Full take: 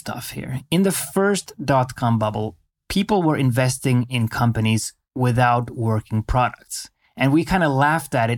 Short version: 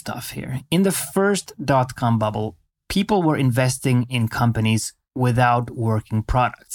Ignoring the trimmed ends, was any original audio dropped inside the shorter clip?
no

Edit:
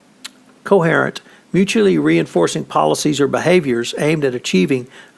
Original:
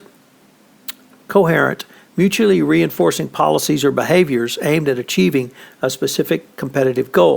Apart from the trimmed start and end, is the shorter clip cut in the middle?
no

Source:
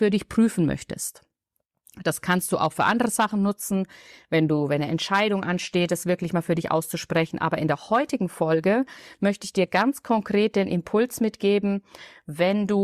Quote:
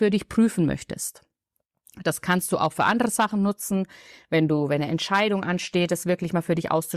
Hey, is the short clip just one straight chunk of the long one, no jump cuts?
yes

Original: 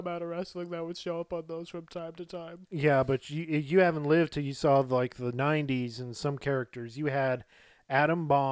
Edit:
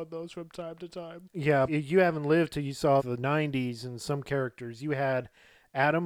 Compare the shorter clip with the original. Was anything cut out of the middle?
yes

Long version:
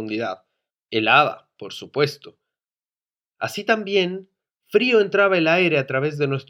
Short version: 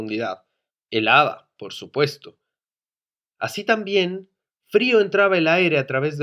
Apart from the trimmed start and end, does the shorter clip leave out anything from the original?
no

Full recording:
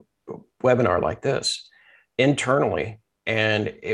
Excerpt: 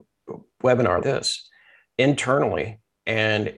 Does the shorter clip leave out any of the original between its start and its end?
yes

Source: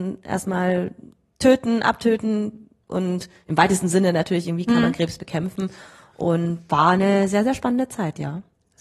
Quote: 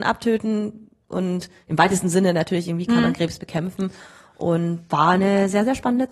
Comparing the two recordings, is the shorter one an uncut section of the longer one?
yes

